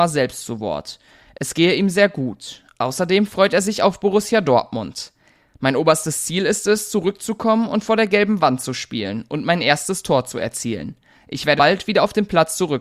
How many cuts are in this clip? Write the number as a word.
one